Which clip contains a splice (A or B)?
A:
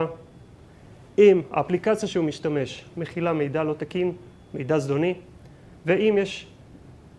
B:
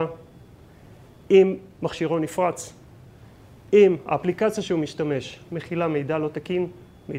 A